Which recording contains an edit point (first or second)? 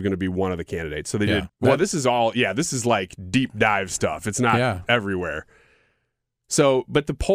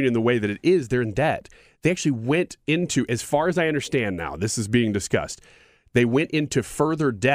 first